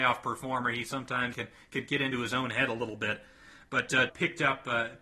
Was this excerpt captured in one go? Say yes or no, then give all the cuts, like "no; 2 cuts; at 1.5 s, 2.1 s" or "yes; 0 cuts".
no; 2 cuts; at 1.3 s, 4.1 s